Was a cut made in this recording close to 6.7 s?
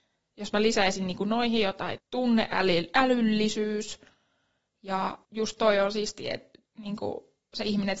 yes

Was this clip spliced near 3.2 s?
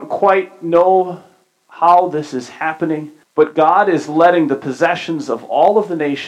yes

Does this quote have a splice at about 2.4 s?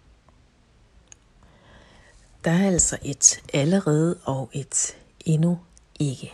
no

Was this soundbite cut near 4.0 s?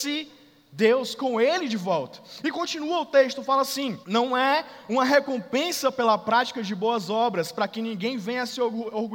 yes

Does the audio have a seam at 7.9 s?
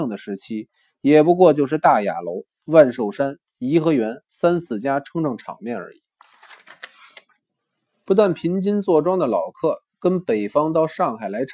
yes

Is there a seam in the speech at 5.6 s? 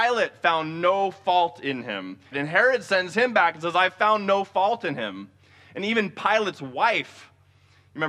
no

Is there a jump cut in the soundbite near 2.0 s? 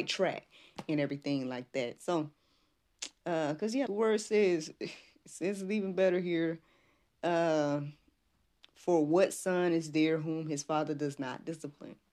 no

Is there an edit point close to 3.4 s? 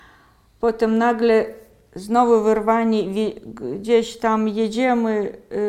no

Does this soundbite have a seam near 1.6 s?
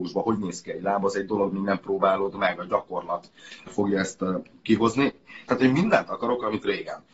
no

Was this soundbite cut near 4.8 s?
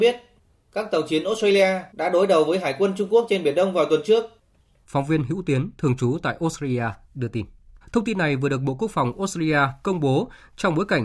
yes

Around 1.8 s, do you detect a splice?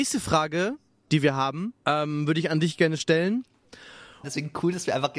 yes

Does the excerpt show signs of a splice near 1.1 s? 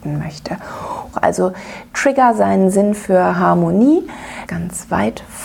yes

